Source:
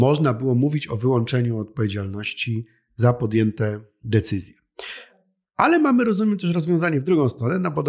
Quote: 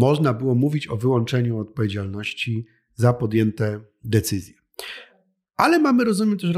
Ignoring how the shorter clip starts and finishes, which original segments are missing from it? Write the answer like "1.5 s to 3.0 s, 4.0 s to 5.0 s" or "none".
none

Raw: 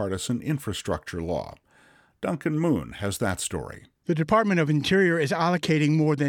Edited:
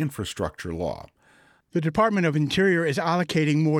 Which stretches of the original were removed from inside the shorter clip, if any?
2.1 s to 3.9 s

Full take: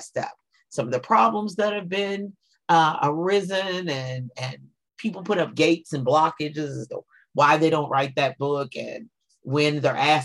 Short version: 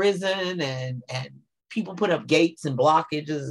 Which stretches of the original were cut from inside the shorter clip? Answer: none

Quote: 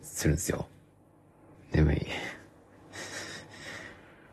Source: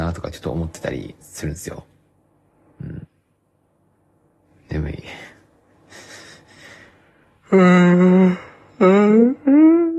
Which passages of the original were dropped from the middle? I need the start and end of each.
2.7 s to 4.5 s

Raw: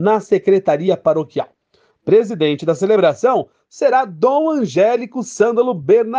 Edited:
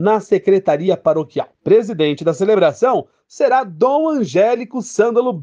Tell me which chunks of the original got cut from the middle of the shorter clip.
1.5 s to 2.0 s

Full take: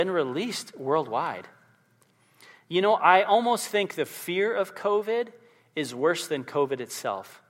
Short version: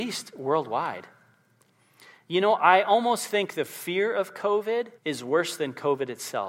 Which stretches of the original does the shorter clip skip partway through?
5.4 s to 5.7 s

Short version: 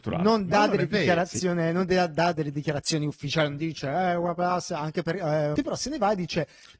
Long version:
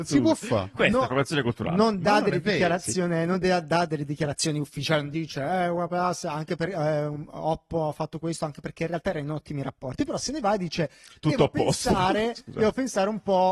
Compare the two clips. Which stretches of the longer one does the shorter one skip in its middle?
7.1 s to 10.0 s

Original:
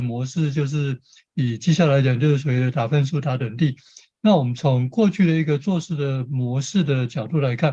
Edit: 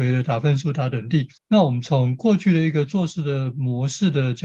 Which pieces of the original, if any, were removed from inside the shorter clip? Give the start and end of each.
3.8 s to 4.1 s

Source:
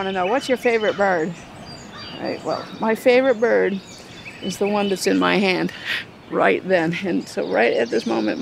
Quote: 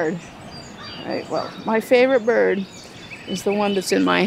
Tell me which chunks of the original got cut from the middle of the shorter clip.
none

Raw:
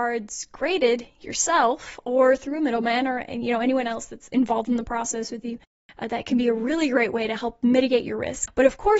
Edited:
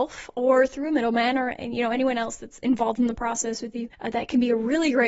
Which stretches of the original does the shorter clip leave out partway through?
5.6 s to 5.9 s

